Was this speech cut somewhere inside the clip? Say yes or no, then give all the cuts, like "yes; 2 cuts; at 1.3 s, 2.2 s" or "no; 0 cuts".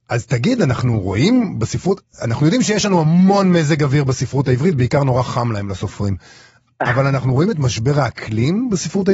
no; 0 cuts